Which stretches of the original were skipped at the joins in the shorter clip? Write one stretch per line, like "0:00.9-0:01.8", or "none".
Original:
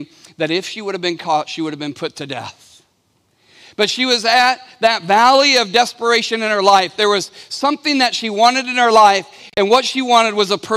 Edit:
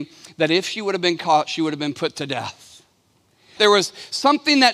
0:03.6-0:07.0

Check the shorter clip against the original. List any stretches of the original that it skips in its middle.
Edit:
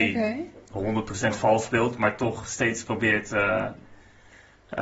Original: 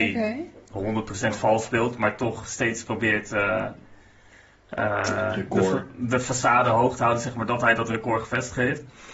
none

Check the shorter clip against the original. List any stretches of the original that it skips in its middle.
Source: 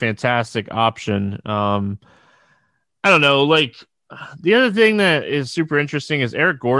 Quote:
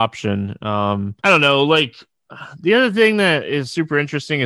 0:02.0-0:03.0

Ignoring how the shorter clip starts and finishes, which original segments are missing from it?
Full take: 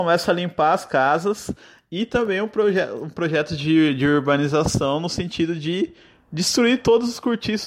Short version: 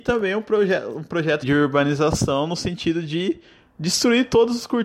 0:03.5-0:03.9

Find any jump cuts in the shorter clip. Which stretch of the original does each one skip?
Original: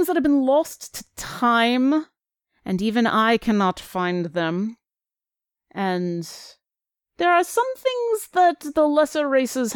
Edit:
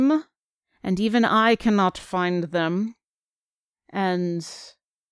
none

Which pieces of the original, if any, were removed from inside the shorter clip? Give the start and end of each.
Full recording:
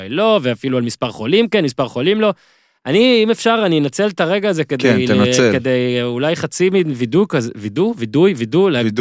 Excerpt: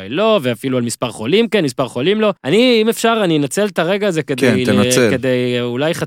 0:02.4-0:02.8

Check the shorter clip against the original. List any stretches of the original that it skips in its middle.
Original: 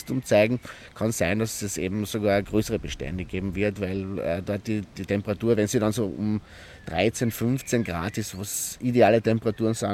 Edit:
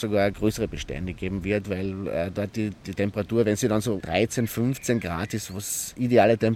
0:06.1-0:06.8

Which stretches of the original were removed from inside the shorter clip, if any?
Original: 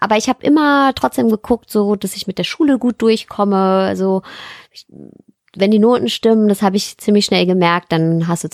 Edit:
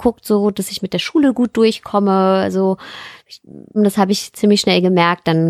0:05.2-0:06.4

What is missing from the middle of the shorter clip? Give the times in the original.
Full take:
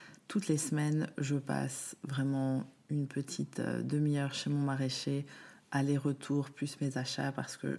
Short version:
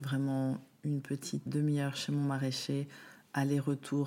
0:03.5-0:03.8

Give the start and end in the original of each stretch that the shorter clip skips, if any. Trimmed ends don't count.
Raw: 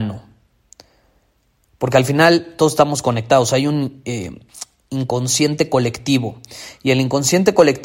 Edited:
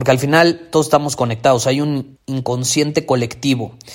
0:04.0-0:04.8

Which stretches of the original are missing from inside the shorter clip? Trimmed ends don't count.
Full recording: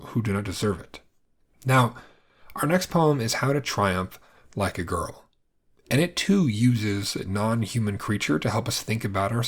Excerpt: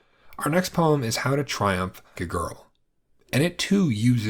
0:04.3-0:04.7

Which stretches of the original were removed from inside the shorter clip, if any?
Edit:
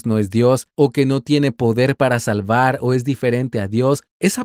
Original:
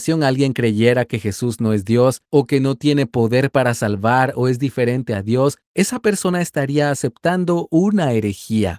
none

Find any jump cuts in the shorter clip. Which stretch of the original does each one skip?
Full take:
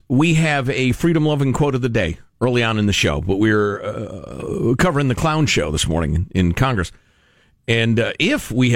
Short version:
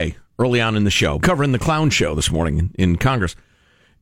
0:03.2-0:04.8

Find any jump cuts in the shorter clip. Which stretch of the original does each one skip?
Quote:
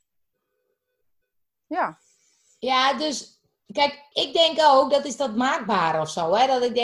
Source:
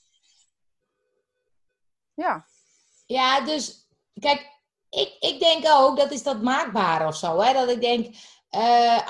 0:04.6-0:05.2

